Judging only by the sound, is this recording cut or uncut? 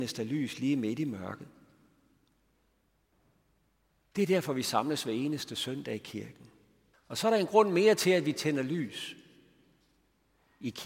cut